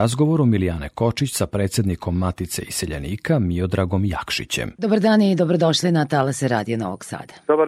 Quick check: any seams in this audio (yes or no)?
yes